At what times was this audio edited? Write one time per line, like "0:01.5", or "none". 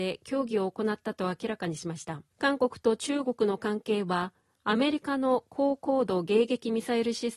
0:02.3